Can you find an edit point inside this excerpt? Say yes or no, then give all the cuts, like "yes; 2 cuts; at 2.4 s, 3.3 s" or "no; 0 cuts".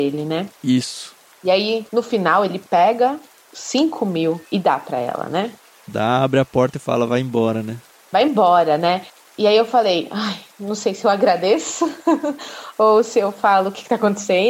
yes; 1 cut; at 4.5 s